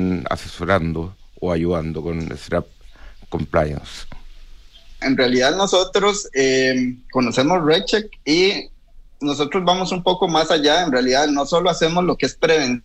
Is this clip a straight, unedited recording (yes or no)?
no